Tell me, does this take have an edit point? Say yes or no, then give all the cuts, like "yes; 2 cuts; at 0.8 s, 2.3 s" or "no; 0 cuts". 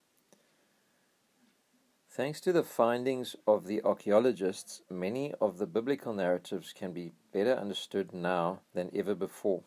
yes; 1 cut; at 8.7 s